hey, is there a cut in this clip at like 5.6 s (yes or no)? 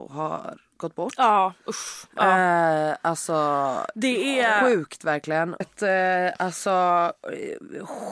yes